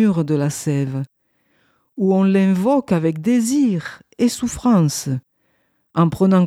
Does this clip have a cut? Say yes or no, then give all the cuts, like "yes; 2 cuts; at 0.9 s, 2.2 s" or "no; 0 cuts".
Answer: no; 0 cuts